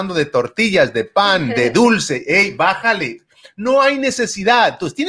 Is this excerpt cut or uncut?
uncut